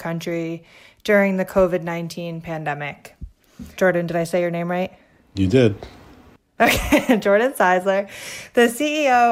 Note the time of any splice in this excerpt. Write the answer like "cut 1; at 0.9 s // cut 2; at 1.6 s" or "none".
cut 1; at 3.8 s